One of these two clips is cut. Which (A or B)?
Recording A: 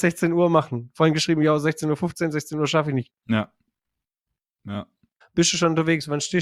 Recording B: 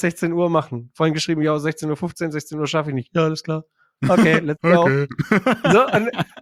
A